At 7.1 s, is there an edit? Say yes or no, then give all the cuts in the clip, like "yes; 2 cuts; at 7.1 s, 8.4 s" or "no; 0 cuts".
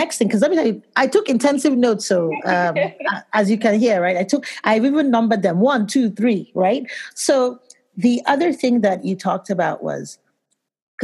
no; 0 cuts